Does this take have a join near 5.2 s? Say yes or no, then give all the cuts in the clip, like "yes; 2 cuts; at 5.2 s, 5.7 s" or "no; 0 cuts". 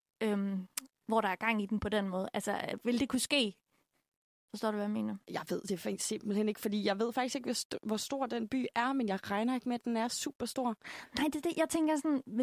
yes; 1 cut; at 5.2 s